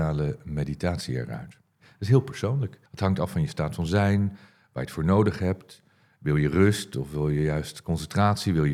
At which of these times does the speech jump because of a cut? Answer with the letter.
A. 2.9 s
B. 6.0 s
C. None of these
A